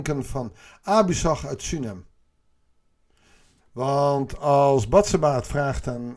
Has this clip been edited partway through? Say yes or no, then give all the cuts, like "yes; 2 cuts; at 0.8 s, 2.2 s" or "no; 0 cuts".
yes; 1 cut; at 3.6 s